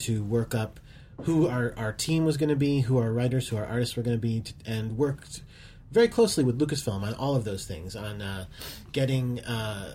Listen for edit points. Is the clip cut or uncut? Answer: uncut